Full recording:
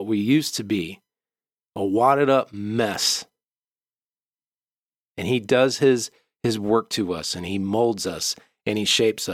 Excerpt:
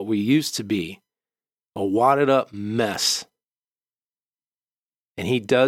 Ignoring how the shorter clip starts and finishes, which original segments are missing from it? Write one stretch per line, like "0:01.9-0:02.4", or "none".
none